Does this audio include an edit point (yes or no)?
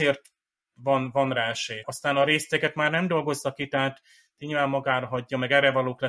yes